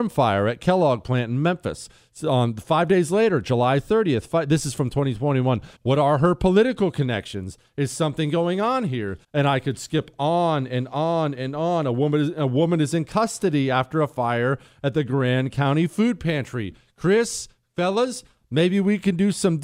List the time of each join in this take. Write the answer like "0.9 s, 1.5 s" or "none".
5.8 s, 9.2 s